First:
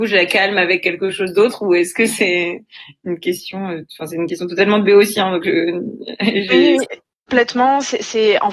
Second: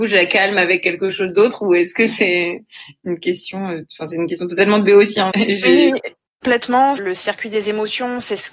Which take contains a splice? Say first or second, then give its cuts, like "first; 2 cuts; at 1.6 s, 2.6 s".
second; 2 cuts; at 5.3 s, 7.0 s